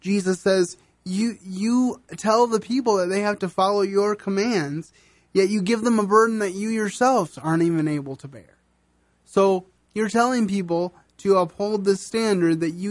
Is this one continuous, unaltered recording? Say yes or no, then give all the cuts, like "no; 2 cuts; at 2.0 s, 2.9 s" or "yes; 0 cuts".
yes; 0 cuts